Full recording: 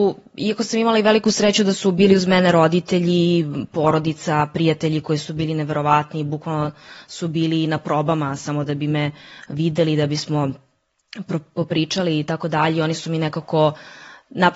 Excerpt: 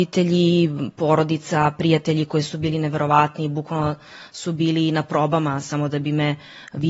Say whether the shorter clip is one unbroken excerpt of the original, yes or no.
yes